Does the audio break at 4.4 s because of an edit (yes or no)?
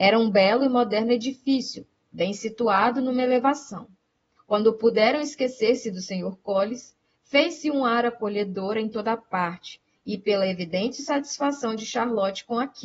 yes